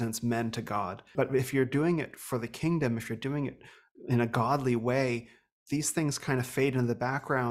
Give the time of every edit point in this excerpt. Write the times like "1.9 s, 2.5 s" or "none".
1.1 s